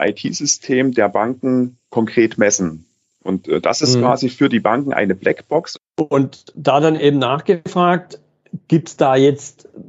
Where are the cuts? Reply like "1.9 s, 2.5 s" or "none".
5.8 s